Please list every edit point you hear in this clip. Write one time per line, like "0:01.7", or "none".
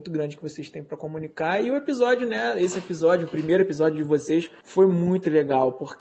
none